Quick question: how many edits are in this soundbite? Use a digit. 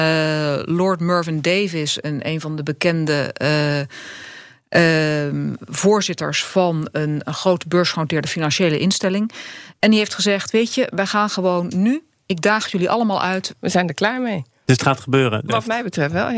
2